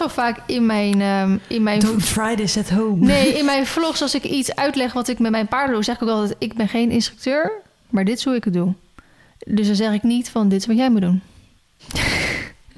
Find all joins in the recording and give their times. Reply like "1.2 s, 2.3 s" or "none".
11.8 s